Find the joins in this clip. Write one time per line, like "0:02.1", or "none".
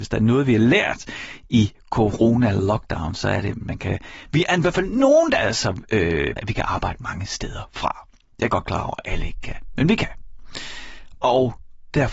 0:06.4